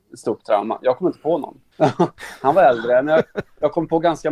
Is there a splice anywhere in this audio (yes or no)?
yes